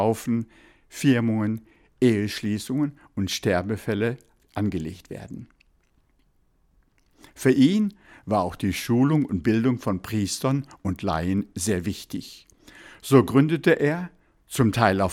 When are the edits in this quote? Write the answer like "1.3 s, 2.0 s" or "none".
none